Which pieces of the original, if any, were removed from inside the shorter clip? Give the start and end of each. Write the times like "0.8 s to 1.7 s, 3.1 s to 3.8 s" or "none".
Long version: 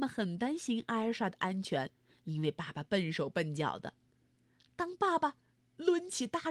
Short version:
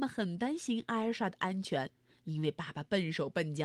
none